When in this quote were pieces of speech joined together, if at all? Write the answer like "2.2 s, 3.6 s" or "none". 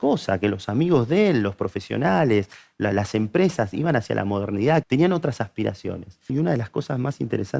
4.8 s, 6.3 s